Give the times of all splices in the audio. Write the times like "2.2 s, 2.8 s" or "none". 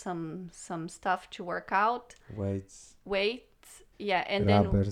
3.9 s

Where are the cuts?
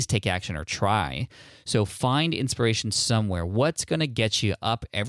none

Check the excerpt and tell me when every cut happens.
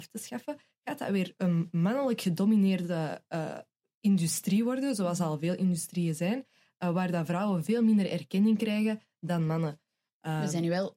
none

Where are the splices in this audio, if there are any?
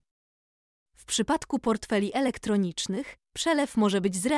3.2 s

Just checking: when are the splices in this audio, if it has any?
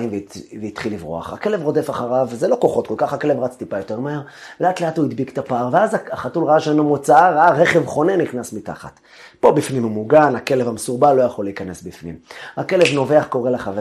none

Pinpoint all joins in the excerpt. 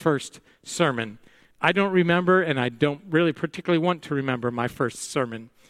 none

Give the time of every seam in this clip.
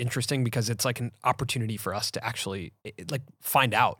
2.8 s

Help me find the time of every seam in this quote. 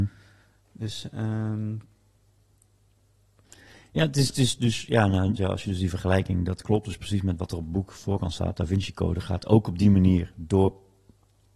5.4 s

